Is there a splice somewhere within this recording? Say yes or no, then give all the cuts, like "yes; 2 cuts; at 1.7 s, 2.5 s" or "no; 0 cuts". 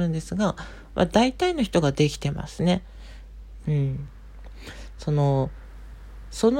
yes; 2 cuts; at 3.6 s, 5.0 s